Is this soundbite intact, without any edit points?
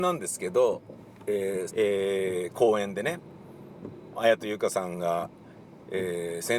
no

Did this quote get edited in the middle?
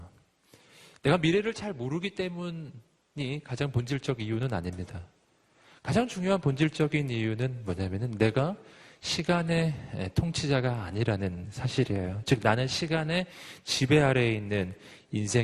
no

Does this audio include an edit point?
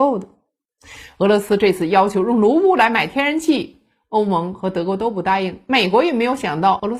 no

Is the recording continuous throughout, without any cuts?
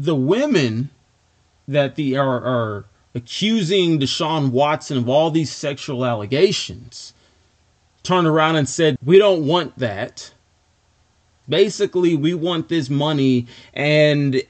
no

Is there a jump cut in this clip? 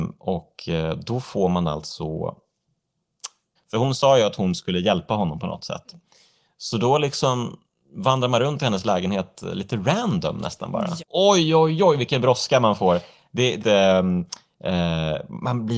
yes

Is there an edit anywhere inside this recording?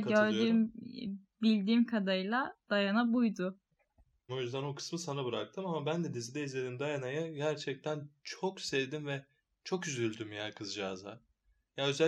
yes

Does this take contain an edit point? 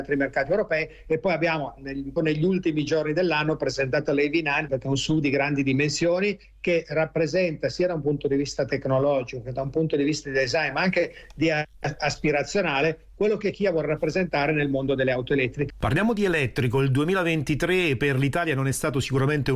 yes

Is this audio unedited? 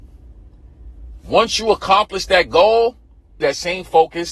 no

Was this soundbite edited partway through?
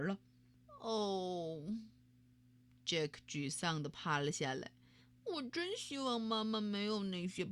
no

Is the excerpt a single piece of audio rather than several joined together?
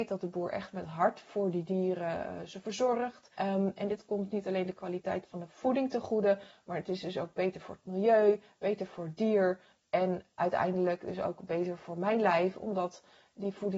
no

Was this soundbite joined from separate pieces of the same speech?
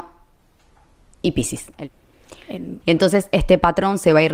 yes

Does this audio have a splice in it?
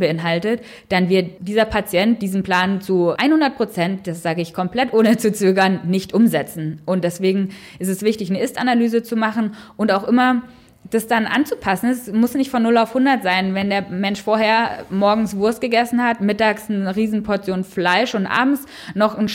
no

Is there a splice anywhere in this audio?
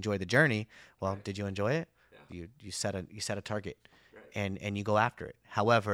yes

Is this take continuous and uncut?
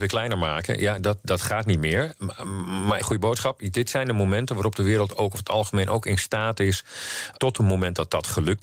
no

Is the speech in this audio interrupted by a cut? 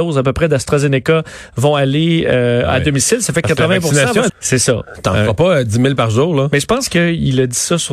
yes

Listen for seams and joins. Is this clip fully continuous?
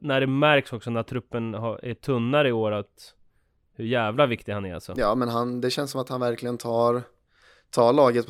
yes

